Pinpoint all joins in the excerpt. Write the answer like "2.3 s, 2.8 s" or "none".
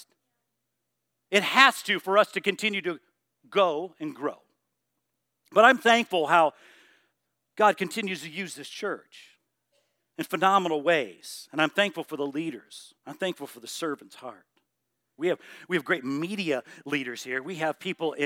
13.0 s, 15.2 s